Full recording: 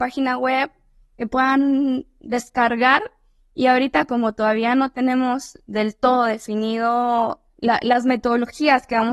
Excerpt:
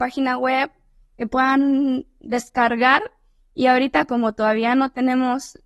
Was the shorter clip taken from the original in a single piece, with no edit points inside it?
yes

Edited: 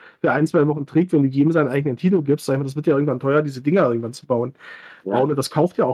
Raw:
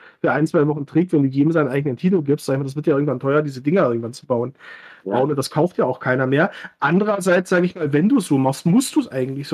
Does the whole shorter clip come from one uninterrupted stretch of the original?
yes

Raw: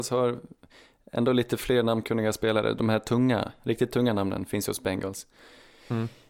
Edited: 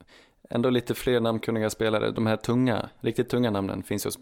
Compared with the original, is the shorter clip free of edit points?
yes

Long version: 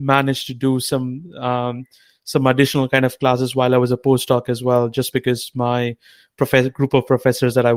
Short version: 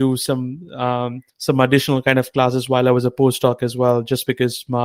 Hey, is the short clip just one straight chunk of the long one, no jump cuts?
no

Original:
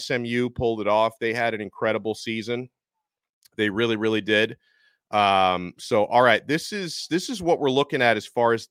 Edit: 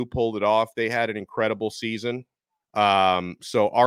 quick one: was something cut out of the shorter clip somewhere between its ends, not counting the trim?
yes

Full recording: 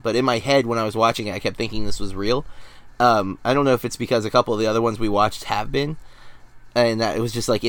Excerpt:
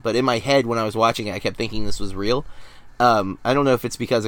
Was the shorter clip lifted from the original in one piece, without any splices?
yes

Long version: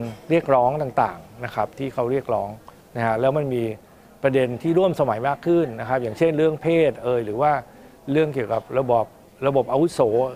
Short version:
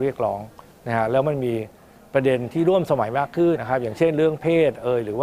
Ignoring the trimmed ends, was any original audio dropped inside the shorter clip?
yes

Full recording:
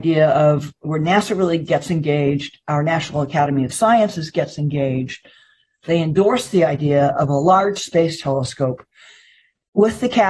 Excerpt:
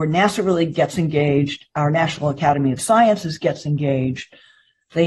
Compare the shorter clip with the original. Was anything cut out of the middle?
no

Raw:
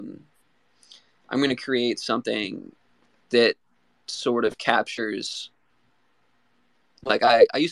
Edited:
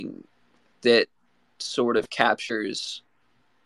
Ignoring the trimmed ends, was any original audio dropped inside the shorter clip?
no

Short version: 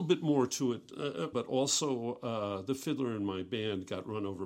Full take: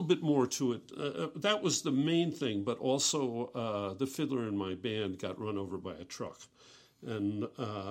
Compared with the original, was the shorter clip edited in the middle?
yes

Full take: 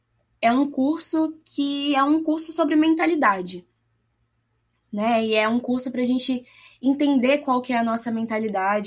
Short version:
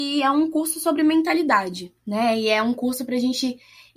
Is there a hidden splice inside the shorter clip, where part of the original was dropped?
yes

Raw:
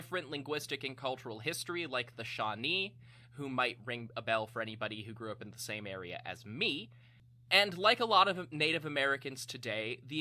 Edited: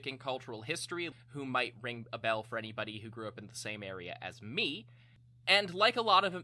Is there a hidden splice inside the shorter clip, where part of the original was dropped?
yes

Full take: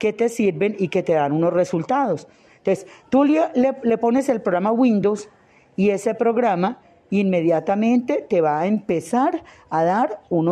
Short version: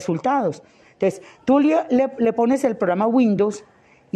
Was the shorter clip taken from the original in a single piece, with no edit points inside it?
yes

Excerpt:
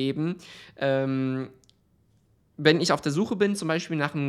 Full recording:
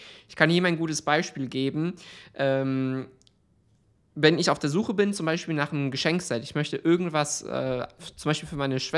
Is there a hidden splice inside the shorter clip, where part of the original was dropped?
no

